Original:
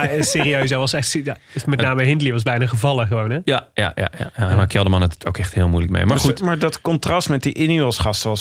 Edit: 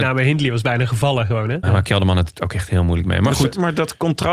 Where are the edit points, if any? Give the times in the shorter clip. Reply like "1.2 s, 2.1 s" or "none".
1.6 s